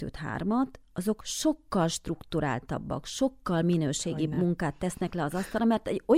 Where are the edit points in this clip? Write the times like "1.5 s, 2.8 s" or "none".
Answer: none

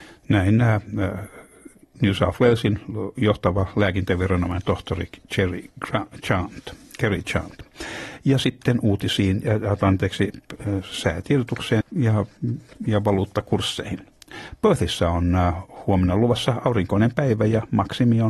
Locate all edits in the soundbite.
11.8 s

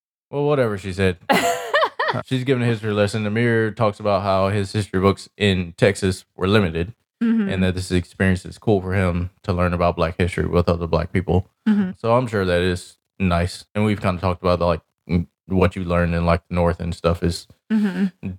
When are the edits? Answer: 15.3 s

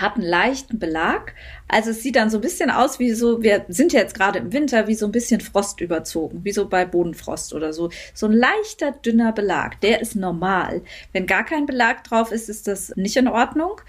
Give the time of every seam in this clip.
none

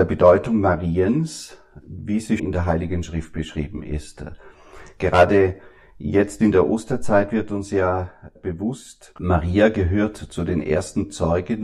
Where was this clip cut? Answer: 2.4 s, 8.4 s

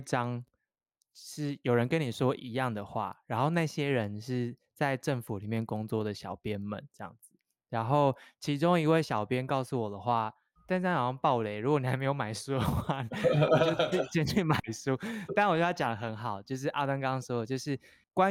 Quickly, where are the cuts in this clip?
none

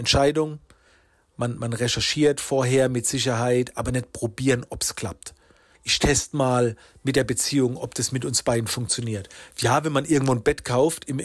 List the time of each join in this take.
5.7 s, 9.5 s

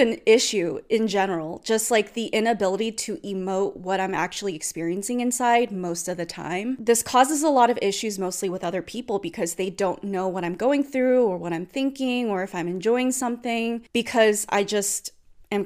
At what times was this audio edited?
none

